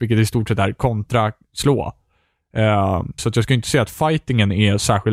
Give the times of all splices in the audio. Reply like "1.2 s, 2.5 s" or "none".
3.2 s

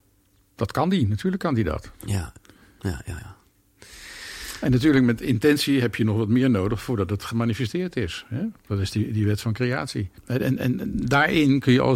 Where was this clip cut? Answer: 3.2 s, 10.2 s

